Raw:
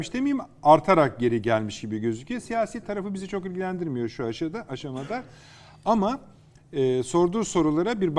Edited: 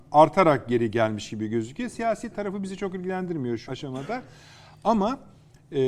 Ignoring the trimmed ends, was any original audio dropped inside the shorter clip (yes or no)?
yes